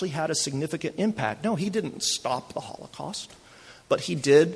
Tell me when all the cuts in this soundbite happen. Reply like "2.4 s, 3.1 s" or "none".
none